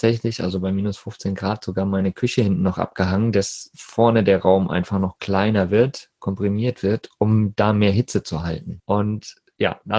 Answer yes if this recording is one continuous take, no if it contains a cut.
no